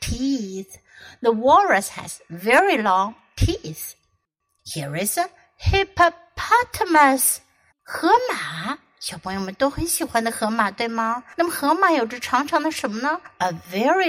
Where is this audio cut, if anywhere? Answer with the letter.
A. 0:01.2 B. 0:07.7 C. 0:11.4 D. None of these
B